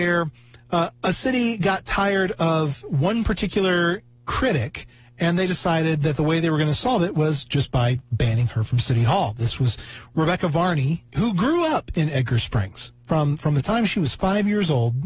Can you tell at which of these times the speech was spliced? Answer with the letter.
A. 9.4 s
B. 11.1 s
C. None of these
B